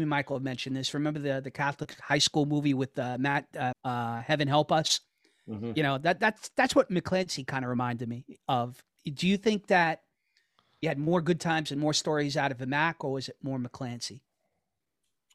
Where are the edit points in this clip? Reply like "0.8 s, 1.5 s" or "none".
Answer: 3.7 s

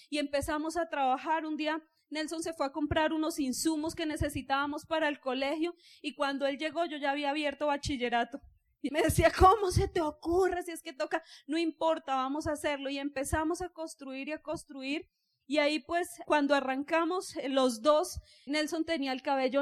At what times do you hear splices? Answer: 8.9 s, 16.2 s, 18.5 s

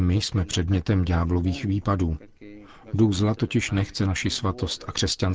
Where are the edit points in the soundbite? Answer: none

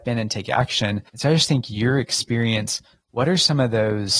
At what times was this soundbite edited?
1.1 s

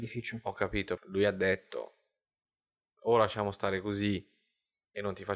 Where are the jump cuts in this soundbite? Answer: 1.0 s

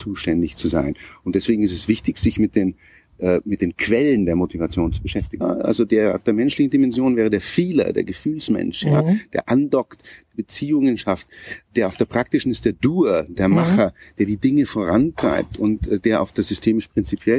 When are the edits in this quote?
5.4 s

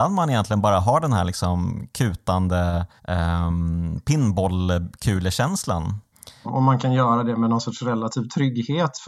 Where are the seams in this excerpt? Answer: 3.0 s, 6.4 s

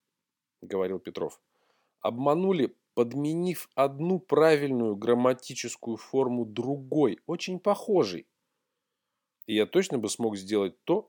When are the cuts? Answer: 9.3 s

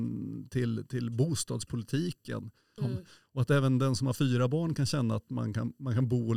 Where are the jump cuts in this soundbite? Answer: 2.8 s

